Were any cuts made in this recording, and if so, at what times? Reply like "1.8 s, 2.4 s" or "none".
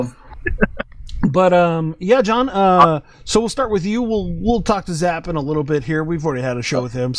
none